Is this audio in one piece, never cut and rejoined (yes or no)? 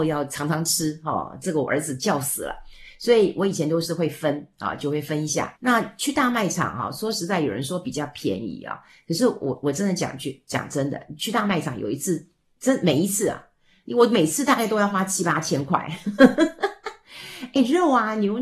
no